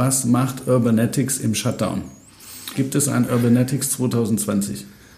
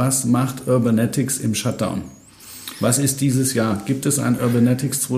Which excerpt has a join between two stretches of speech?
first; 1 cut; at 2.7 s

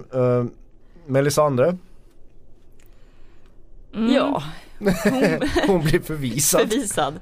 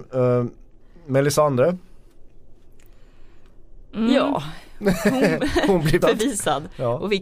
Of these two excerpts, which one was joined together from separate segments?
second; 1 cut; at 6.0 s

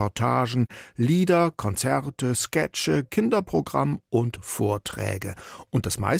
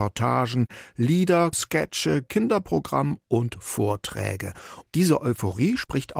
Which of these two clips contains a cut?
second; 2 cuts; at 1.5 s, 4.8 s

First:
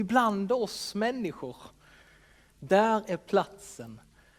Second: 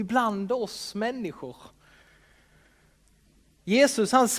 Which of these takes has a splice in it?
first; 1 cut; at 2.5 s

